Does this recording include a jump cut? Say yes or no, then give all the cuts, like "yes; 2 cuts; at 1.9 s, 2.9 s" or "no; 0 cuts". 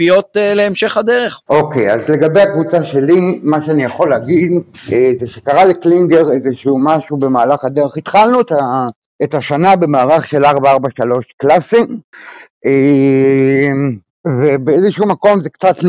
no; 0 cuts